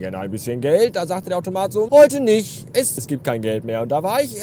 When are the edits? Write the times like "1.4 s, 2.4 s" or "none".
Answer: 1.9 s, 3.0 s